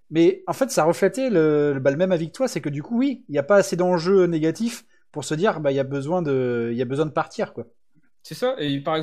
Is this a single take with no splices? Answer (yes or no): yes